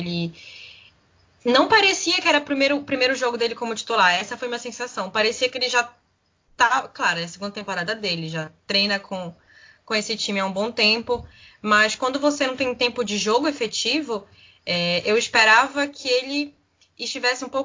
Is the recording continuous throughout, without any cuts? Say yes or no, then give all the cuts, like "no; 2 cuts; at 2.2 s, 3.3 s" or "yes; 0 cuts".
yes; 0 cuts